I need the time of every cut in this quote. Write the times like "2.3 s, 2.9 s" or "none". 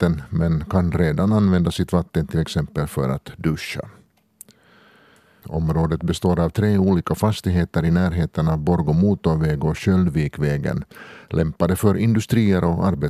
5.4 s